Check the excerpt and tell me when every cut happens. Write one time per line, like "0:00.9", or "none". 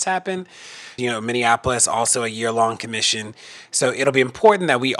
0:01.0